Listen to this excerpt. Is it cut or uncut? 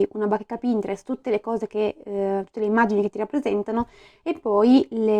uncut